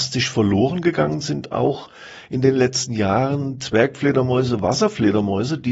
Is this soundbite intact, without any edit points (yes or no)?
yes